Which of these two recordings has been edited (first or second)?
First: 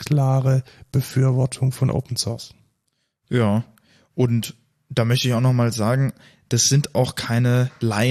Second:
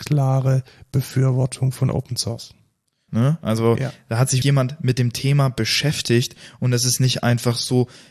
second